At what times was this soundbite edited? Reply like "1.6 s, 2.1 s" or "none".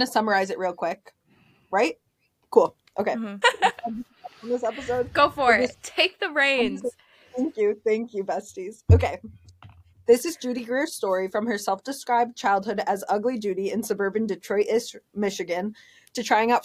3.4 s

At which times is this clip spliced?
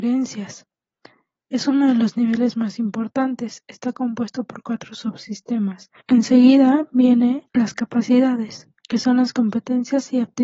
6.0 s, 7.5 s, 8.8 s

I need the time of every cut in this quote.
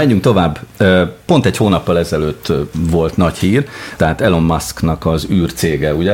4.0 s

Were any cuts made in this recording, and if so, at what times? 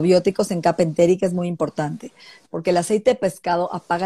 2.4 s

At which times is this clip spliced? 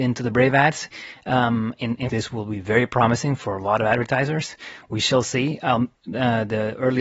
2.1 s

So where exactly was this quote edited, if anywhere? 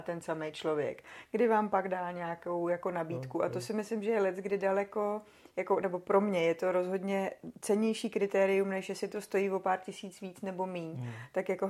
none

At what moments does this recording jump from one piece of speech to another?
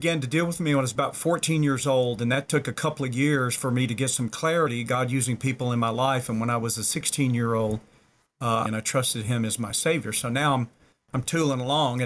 8.7 s

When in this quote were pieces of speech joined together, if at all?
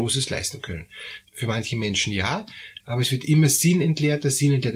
1.2 s, 2.8 s

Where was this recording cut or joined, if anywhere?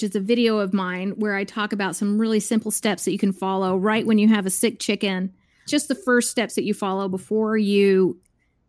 none

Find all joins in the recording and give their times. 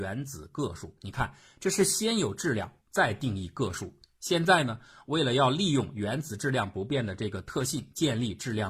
none

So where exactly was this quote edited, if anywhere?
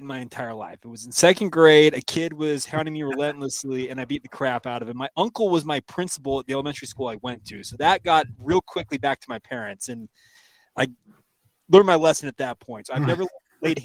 none

